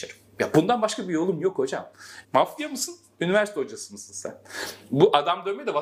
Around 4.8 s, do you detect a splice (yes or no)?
no